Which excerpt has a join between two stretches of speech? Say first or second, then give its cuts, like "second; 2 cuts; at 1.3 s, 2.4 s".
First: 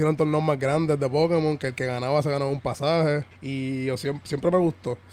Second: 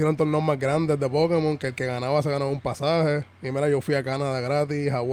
first; 1 cut; at 3.3 s